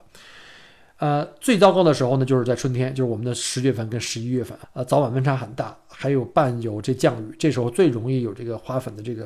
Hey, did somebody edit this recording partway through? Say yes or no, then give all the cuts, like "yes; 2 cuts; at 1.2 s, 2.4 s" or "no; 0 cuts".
yes; 1 cut; at 4.6 s